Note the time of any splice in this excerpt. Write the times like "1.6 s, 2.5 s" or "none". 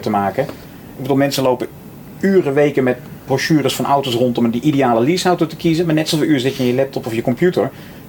none

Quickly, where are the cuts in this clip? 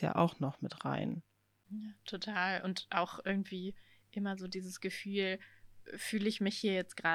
none

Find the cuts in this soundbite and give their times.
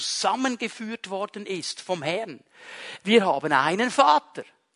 3.0 s

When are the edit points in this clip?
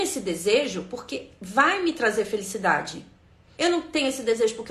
3.5 s

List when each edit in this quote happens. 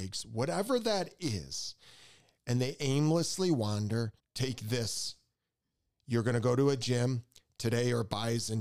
4.2 s

